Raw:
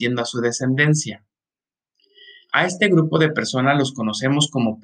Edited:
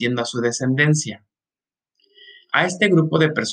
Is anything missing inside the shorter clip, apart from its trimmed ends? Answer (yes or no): no